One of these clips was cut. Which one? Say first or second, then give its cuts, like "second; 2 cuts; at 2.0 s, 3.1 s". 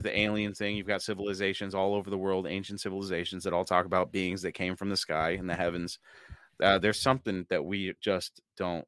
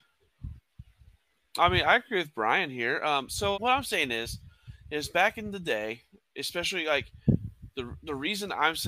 second; 1 cut; at 3.5 s